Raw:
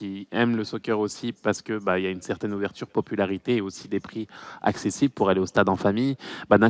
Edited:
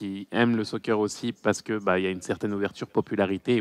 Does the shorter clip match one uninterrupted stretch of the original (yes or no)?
yes